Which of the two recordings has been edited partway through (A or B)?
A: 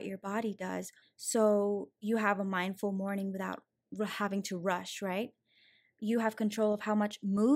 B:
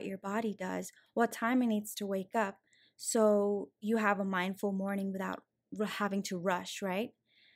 A